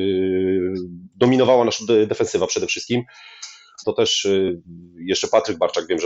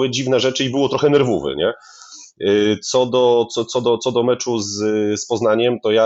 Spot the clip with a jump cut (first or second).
first